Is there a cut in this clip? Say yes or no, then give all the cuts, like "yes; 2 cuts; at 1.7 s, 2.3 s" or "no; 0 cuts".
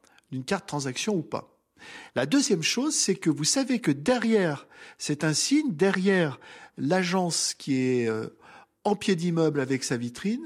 no; 0 cuts